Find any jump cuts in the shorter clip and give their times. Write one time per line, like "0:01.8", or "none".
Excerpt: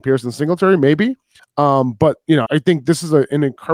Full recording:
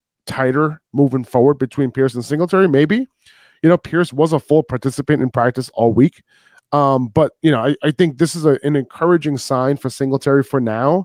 0:01.4
0:02.5